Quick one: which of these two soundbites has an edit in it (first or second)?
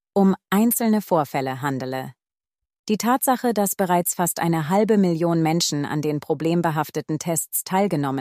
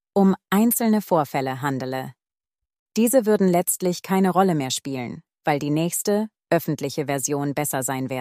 first